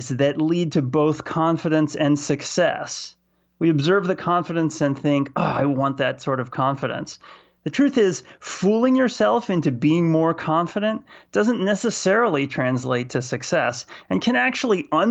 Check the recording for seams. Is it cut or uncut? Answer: uncut